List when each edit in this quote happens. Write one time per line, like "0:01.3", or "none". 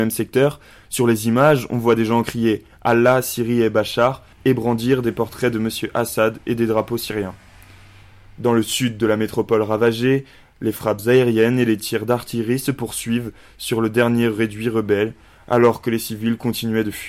none